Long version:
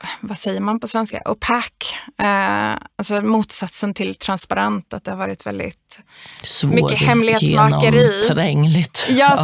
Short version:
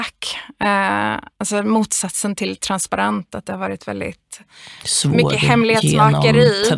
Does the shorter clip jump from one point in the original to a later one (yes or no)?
no